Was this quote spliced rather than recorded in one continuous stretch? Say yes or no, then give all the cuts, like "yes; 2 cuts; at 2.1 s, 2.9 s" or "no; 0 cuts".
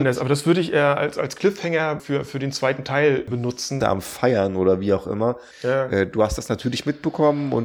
yes; 2 cuts; at 3.8 s, 5.5 s